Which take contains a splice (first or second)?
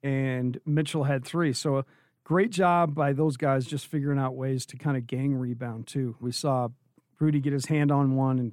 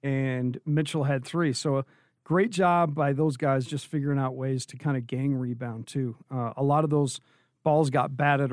first